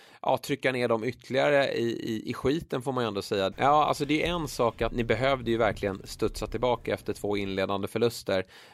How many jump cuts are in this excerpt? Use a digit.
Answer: 2